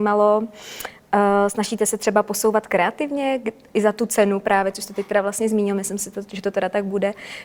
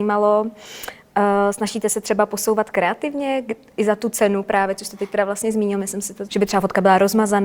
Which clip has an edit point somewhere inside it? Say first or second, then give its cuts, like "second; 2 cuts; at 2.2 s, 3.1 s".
second; 1 cut; at 6.3 s